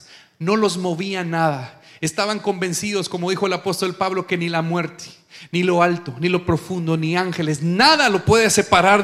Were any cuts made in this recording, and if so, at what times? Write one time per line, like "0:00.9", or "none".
0:05.5